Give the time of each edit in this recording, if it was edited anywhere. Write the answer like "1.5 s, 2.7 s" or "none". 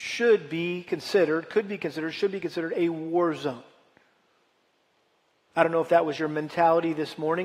none